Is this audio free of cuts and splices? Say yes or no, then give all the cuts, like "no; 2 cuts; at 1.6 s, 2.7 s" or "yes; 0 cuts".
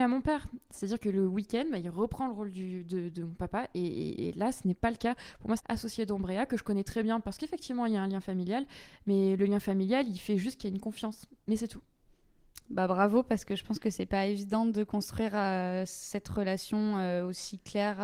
no; 1 cut; at 5.6 s